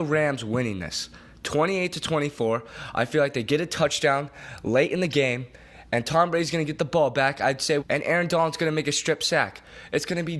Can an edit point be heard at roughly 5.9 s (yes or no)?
no